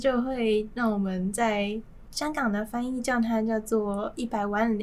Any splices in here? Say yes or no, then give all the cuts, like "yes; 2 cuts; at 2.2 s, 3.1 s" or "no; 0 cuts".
yes; 1 cut; at 2.1 s